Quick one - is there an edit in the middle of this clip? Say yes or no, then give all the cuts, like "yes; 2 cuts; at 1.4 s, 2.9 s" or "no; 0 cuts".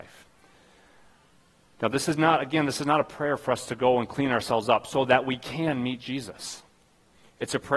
no; 0 cuts